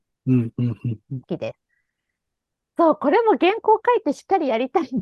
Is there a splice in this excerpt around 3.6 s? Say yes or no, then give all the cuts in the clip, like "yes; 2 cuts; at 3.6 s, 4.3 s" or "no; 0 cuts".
no; 1 cut; at 1.2 s